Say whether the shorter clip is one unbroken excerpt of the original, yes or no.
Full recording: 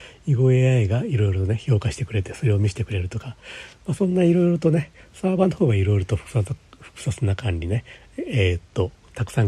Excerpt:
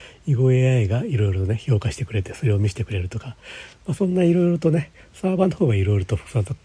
yes